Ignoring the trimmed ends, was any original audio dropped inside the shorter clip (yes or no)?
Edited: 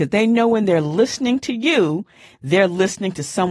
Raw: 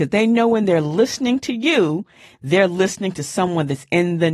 no